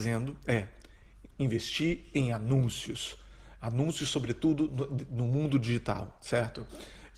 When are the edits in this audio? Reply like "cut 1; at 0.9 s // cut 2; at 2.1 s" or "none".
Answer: cut 1; at 1.3 s